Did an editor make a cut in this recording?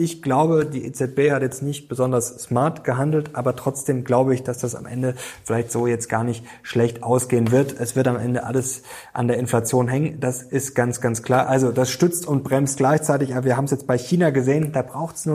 yes; 1 cut; at 11.4 s

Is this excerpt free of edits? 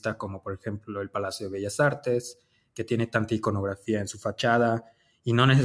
yes; 0 cuts

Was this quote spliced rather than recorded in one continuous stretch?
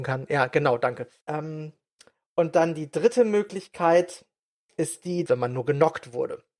yes; 2 cuts; at 1.2 s, 5.3 s

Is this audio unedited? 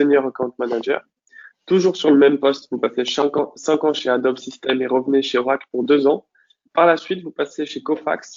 yes; 0 cuts

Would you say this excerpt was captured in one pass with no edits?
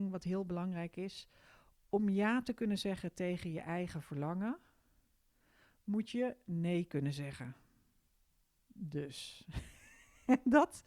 yes; 0 cuts

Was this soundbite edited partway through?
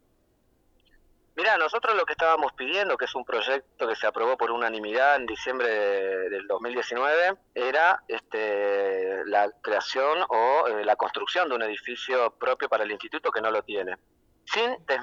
yes; 1 cut; at 7.5 s

